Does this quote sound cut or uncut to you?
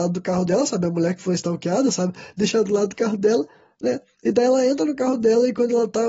uncut